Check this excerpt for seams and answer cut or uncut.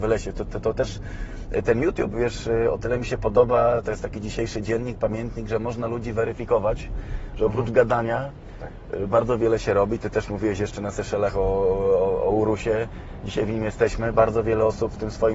uncut